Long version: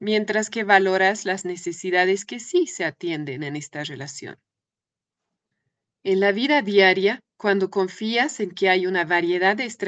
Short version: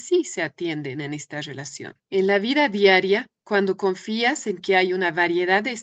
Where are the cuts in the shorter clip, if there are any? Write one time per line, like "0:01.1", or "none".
0:02.0

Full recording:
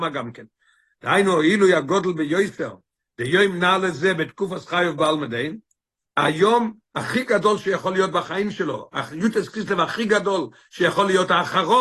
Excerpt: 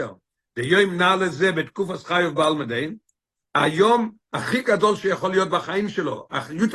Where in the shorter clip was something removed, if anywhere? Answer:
none

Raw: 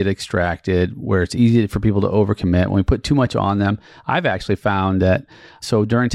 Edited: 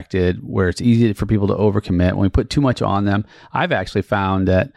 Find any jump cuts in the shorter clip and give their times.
none

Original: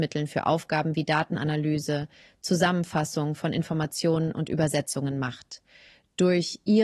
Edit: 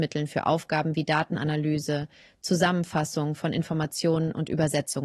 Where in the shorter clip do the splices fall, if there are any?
none

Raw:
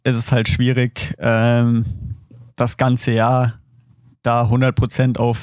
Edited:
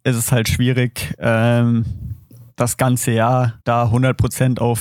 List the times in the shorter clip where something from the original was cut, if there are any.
0:03.6

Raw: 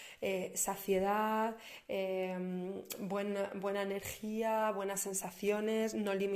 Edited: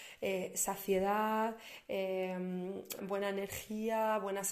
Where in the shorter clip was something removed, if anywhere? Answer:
0:03.0

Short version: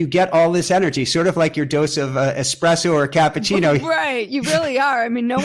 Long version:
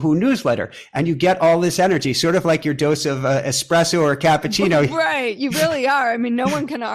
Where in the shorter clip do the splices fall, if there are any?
none

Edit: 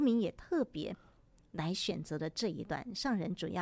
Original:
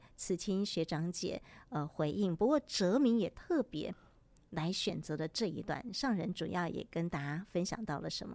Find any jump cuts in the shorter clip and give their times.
none

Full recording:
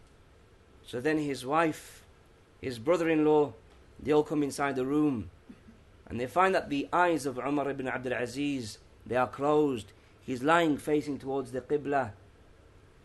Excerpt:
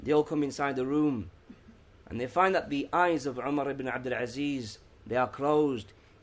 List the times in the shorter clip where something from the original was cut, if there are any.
none

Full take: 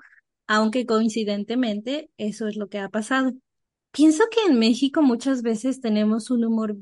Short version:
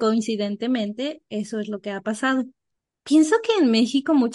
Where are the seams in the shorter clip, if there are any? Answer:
none

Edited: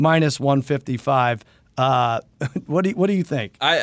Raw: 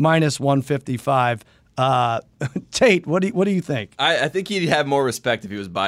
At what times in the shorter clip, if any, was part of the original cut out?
0:02.7

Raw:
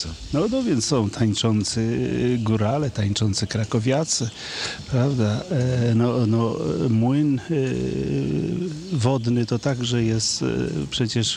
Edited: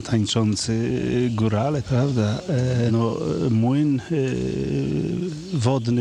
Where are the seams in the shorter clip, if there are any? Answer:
0:01.8
0:02.9

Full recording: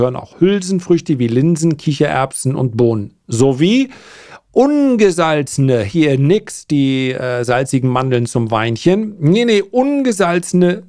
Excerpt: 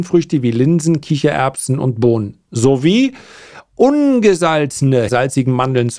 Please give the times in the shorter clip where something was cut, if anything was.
0:05.1

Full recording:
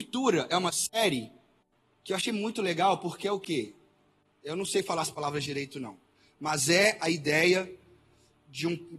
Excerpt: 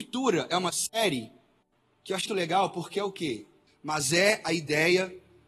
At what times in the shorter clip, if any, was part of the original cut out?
0:02.3
0:03.7

